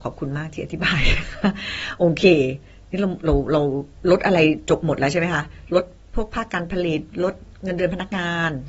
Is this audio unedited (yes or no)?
no